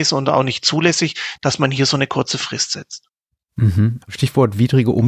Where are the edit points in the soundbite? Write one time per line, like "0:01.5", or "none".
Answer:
0:04.0